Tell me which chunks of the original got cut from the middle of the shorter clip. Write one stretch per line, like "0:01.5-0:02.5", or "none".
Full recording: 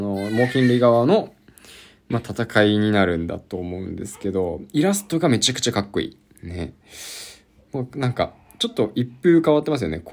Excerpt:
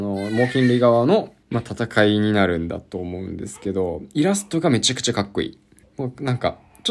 0:01.4-0:02.0
0:06.4-0:07.6